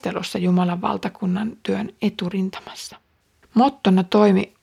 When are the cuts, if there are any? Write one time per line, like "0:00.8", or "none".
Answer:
0:03.4